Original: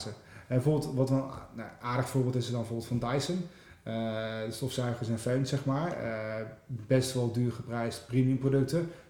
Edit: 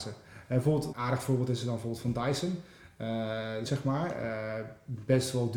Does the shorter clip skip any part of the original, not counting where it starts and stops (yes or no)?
yes